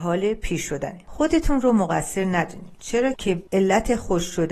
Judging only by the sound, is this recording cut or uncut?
cut